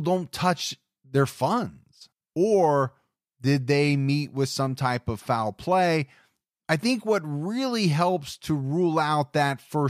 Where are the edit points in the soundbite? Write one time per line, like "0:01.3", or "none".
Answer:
0:02.1